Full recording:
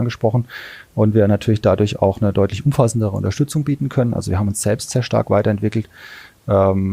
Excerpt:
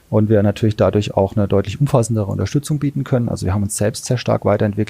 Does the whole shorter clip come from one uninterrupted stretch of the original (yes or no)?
yes